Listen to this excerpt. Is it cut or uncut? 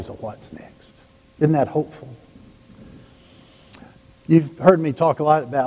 uncut